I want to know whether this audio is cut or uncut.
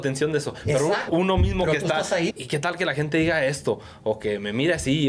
cut